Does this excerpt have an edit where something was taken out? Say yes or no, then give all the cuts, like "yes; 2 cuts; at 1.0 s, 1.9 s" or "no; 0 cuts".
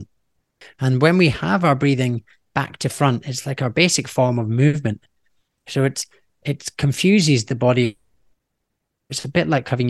no; 0 cuts